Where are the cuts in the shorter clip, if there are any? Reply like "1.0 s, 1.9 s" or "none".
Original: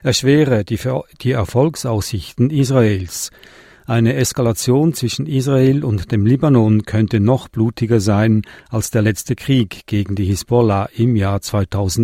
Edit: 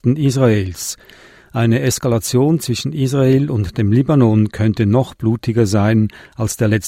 none